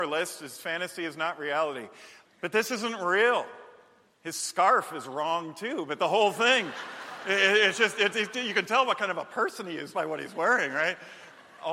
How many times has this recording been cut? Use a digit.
3